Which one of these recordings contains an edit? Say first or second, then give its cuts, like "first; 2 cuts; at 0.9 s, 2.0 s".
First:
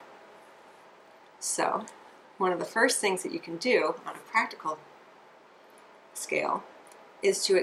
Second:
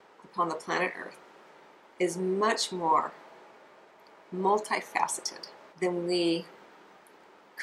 second; 1 cut; at 5.7 s